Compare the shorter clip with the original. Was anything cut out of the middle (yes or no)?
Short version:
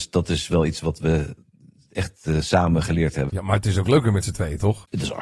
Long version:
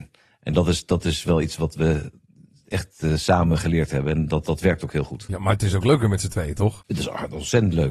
yes